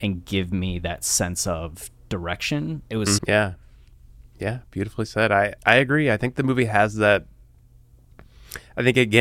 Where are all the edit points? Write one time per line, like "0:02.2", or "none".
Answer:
0:03.2
0:05.6